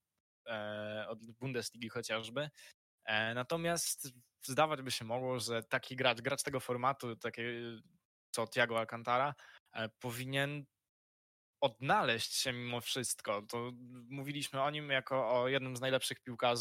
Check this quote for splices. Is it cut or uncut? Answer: uncut